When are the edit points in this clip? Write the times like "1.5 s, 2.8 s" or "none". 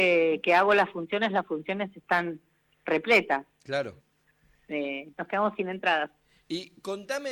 4.0 s, 5.1 s